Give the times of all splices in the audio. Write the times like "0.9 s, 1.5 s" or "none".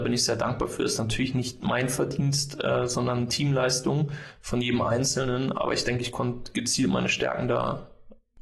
none